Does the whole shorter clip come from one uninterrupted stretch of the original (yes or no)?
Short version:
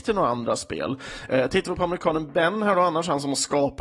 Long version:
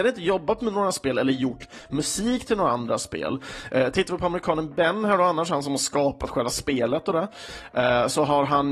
yes